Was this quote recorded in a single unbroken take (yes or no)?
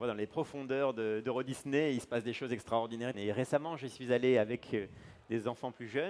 no